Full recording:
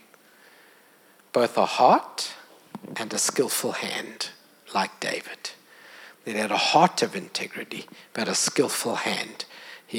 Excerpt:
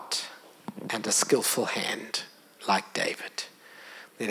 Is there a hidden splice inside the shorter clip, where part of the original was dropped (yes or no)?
no